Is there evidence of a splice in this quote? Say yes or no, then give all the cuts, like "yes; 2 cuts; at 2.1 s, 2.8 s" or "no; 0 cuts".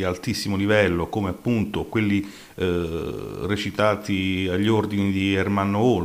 no; 0 cuts